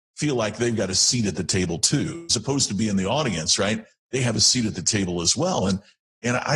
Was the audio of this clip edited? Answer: no; 0 cuts

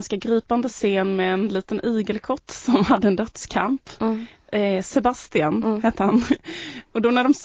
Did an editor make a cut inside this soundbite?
no; 0 cuts

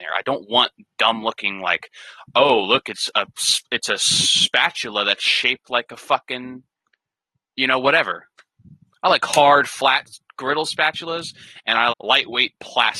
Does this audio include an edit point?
yes; 2 cuts; at 8.9 s, 11.9 s

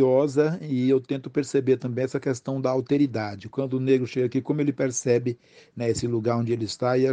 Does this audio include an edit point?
yes; 1 cut; at 3.5 s

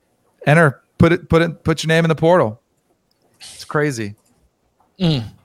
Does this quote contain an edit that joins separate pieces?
no; 0 cuts

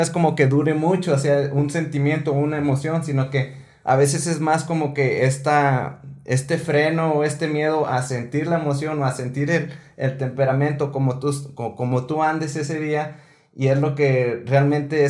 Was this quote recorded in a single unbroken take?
yes; 0 cuts

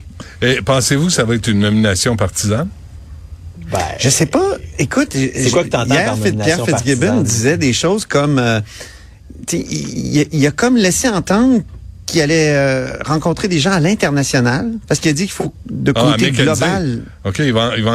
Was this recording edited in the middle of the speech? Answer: yes; 1 cut; at 15.6 s

